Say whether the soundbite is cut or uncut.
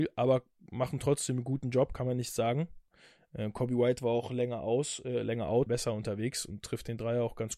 cut